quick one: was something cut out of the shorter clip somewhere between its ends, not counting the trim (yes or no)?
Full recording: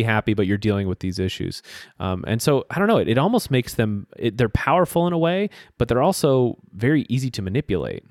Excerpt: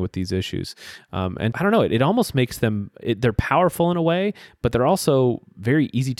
yes